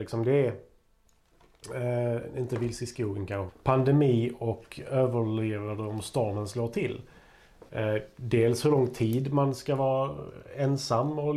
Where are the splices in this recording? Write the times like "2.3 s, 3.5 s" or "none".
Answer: 3.5 s